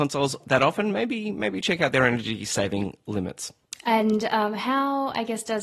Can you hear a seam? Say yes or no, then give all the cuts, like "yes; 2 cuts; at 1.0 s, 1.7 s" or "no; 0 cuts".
no; 0 cuts